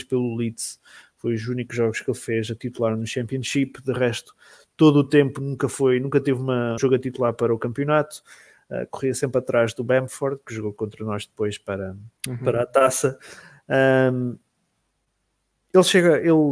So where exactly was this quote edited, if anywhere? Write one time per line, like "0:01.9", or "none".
0:06.8
0:12.2